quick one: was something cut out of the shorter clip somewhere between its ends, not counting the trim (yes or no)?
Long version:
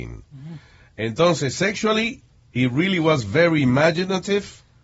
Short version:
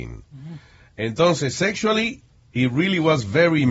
no